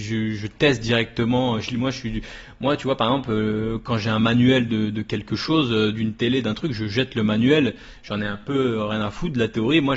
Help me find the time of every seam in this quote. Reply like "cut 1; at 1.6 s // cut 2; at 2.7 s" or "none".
none